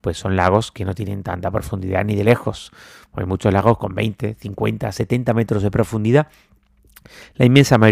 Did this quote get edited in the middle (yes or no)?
no